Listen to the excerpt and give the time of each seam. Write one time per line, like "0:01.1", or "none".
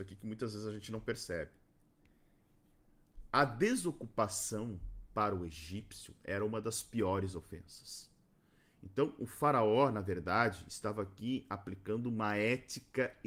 none